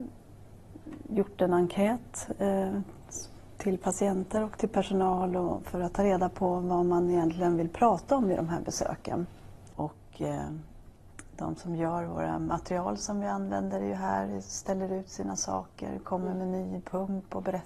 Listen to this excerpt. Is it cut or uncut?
cut